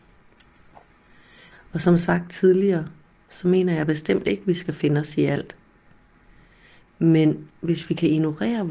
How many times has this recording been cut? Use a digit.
0